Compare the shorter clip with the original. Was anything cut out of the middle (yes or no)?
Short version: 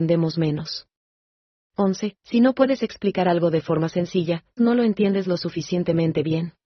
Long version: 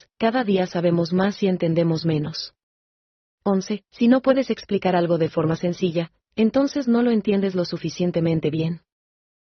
yes